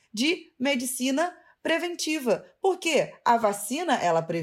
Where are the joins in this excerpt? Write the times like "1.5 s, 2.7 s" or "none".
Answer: none